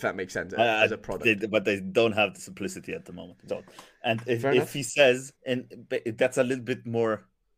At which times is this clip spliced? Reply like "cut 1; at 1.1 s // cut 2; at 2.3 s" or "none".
cut 1; at 3.5 s // cut 2; at 5.4 s